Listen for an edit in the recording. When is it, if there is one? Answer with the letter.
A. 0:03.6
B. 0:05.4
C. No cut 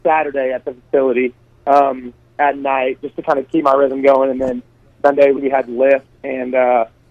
B